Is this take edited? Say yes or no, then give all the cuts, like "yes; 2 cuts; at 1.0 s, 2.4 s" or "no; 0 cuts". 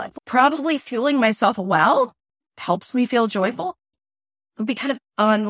yes; 1 cut; at 3.9 s